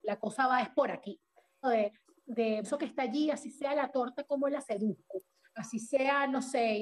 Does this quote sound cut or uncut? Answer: cut